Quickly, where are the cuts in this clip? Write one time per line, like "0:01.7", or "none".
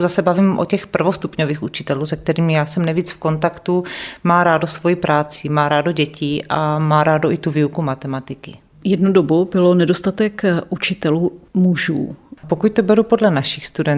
0:12.4